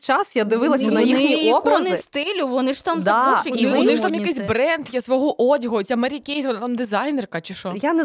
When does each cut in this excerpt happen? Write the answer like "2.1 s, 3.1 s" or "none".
3.7 s